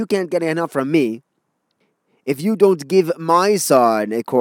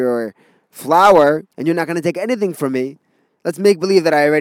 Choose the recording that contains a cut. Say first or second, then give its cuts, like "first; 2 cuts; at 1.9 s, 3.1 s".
second; 2 cuts; at 1.5 s, 3.3 s